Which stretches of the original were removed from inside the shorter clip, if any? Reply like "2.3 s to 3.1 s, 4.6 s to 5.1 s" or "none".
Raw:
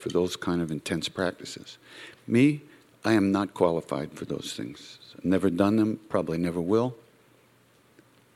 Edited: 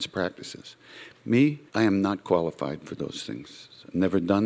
2.7 s to 3.0 s